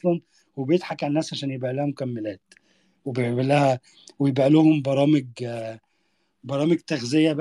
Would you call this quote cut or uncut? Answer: uncut